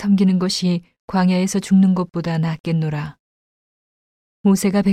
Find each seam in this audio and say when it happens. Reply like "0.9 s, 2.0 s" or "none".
none